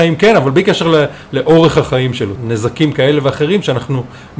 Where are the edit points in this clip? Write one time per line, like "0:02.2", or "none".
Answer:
0:02.4